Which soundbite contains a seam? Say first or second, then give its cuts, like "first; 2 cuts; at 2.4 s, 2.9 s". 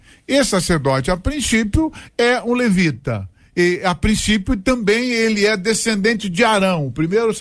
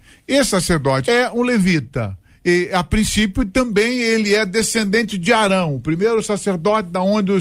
second; 1 cut; at 1.0 s